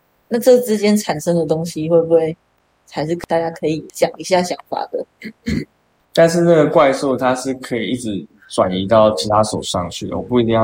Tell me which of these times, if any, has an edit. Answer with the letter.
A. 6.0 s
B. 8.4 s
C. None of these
A